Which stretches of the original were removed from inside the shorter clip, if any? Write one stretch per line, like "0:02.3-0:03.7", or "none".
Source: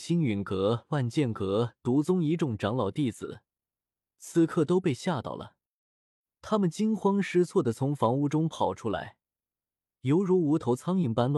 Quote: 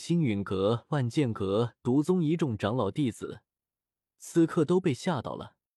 none

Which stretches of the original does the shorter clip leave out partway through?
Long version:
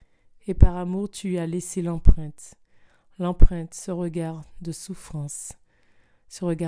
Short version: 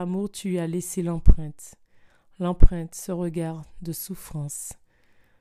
none

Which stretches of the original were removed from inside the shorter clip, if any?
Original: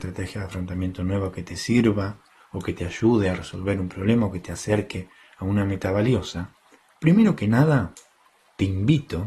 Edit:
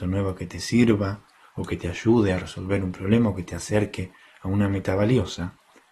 none

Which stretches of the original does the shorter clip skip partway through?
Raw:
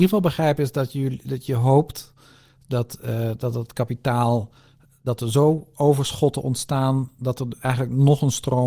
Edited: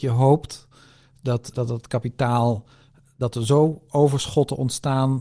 0:03.0-0:03.4

